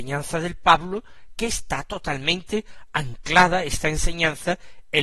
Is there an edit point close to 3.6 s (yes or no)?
no